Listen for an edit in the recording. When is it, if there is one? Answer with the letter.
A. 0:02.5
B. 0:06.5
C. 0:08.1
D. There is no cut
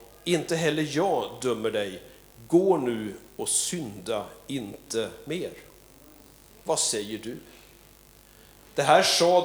B